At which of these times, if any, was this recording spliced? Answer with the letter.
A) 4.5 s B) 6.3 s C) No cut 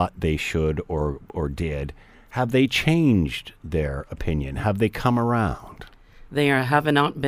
C